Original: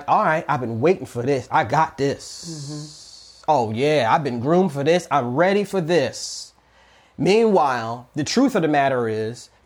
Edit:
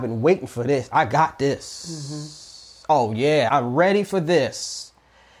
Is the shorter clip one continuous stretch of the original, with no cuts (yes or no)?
no